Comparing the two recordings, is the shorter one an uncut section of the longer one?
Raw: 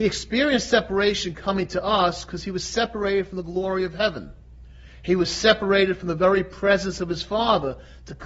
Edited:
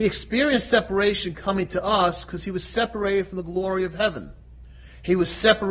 yes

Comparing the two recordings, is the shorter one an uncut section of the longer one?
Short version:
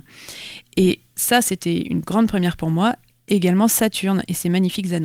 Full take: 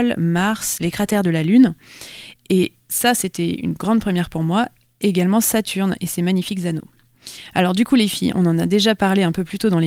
yes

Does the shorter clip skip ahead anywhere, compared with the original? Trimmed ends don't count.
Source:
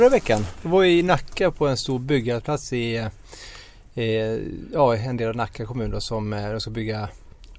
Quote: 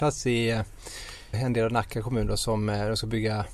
yes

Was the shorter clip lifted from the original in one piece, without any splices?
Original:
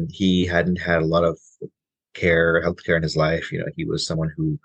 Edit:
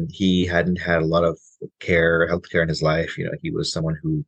no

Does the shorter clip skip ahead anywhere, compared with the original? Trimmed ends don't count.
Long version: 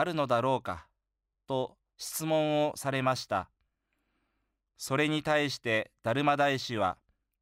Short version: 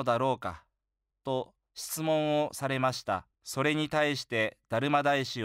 yes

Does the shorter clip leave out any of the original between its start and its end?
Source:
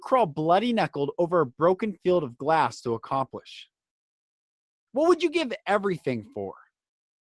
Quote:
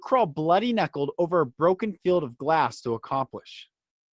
no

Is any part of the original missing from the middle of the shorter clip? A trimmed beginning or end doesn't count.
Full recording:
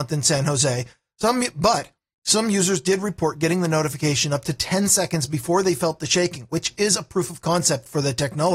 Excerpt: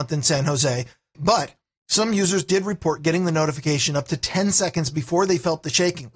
yes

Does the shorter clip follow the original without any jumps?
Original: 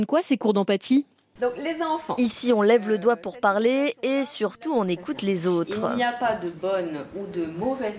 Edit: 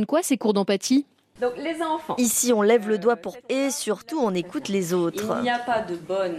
no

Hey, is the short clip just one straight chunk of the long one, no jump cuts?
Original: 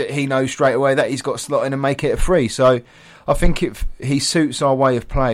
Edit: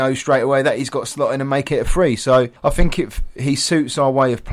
no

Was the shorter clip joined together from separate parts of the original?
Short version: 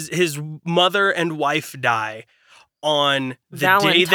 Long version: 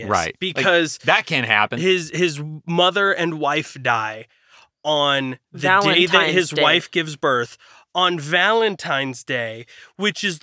no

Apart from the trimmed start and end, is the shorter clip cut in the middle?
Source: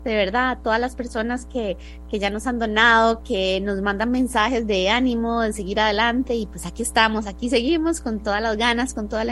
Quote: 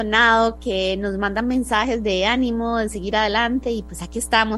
no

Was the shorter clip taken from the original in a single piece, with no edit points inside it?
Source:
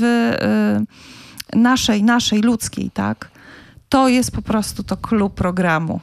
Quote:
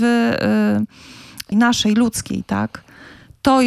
no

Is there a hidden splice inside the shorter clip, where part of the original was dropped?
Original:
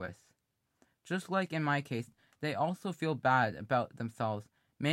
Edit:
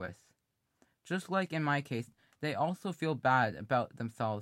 no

